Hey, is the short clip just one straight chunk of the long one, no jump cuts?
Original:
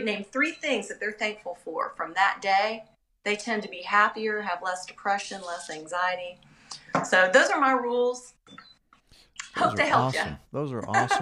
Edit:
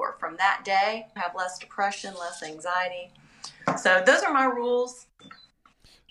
no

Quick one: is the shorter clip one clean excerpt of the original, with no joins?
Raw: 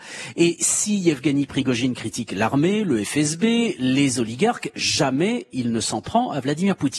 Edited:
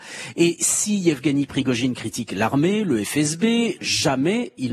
no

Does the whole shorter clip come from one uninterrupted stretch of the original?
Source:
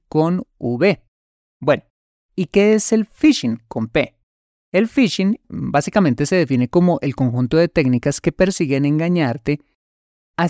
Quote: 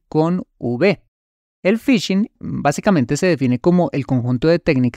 no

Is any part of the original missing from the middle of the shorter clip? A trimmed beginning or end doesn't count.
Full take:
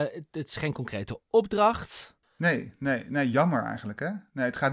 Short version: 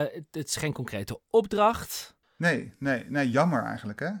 no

